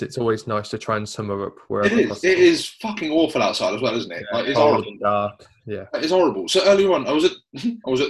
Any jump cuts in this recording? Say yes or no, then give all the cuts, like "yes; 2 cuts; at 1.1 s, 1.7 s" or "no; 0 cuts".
no; 0 cuts